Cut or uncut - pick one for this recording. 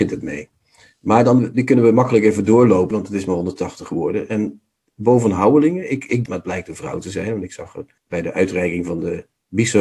cut